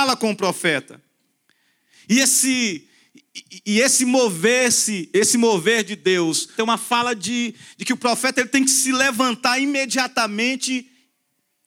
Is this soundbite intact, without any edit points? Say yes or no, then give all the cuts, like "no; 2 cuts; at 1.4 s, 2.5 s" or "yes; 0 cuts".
no; 2 cuts; at 3.6 s, 6.6 s